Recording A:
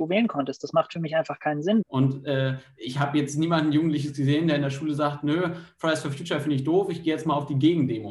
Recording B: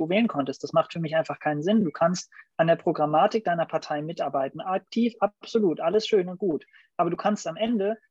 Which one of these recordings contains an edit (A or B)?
A